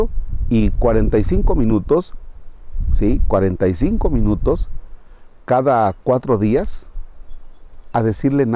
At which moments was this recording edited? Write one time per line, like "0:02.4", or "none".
none